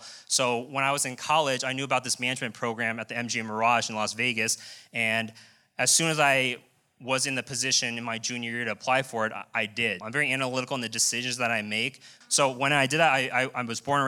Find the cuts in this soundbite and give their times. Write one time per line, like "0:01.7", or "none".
0:10.0
0:12.2